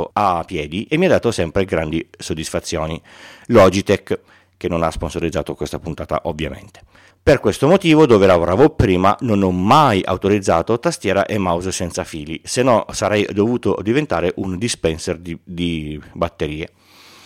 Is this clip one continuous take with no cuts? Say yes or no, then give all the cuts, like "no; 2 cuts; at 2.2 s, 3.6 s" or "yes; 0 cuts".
no; 1 cut; at 7.1 s